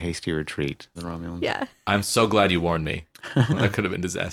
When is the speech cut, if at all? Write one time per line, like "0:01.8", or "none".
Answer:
0:01.0